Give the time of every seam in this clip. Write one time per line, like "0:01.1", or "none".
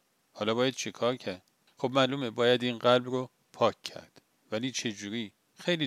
none